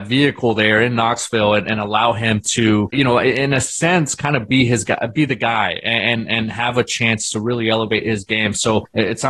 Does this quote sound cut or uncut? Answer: cut